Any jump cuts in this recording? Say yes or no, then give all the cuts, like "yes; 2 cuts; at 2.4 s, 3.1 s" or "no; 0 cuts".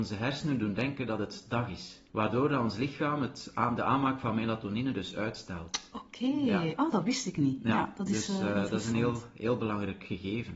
yes; 1 cut; at 2.1 s